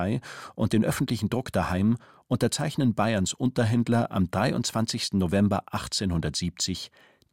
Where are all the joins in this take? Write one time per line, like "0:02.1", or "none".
none